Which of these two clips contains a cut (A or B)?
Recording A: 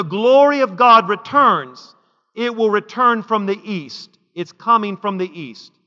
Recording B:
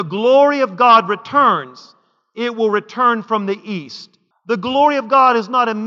B